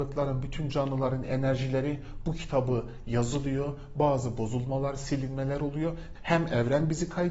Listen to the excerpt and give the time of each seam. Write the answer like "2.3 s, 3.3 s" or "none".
6.2 s